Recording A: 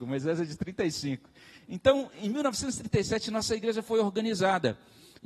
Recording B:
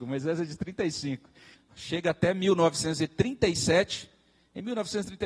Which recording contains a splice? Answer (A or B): B